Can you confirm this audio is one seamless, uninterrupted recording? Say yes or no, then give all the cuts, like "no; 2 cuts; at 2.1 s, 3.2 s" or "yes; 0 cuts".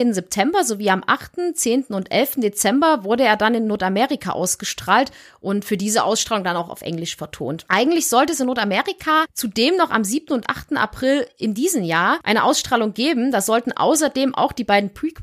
yes; 0 cuts